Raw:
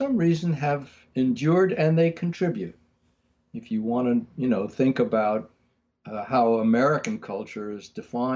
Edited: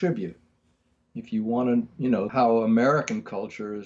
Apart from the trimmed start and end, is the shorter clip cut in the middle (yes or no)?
yes